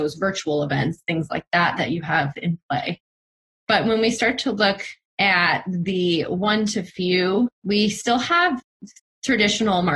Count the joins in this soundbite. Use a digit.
1